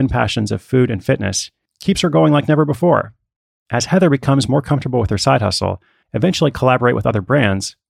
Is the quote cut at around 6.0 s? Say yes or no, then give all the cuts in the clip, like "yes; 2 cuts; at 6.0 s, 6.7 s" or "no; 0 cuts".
yes; 1 cut; at 6.0 s